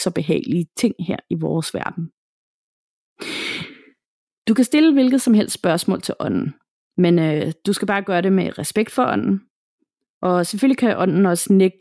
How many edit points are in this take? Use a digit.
0